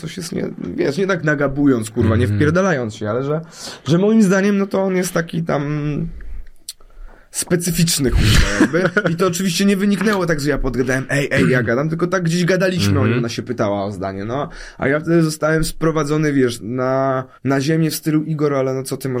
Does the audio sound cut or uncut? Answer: cut